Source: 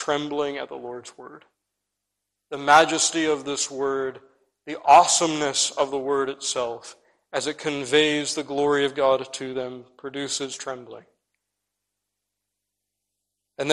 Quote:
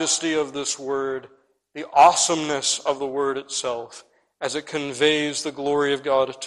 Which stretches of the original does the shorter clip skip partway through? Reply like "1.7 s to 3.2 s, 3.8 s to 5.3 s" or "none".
none